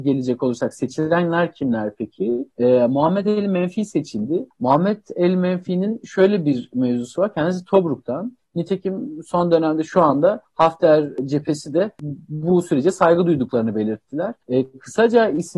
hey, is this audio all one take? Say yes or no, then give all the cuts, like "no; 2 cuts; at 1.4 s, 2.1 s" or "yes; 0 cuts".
no; 3 cuts; at 2.5 s, 8.4 s, 14.4 s